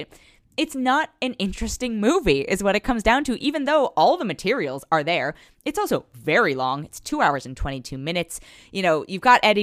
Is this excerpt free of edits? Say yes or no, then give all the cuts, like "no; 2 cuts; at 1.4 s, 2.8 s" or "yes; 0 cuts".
yes; 0 cuts